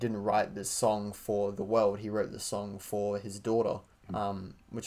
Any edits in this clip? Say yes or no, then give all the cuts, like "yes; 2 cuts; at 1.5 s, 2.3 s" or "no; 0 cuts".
yes; 1 cut; at 3.9 s